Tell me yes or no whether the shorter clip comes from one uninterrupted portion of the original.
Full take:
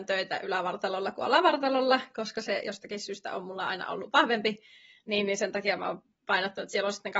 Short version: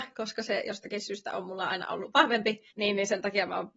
no